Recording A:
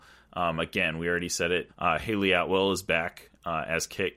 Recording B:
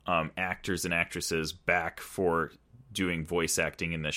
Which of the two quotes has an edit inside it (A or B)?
A